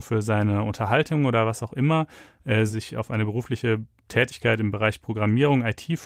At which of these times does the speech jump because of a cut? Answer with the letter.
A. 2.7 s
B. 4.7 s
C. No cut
A